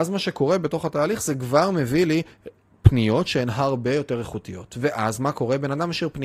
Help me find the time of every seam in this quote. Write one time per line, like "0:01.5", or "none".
none